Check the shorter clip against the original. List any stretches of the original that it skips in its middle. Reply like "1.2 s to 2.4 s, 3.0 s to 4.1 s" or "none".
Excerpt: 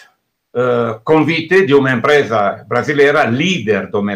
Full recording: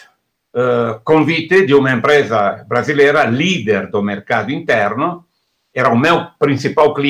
none